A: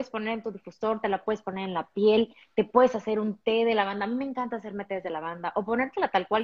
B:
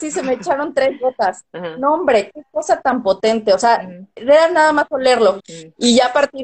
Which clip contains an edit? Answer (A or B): B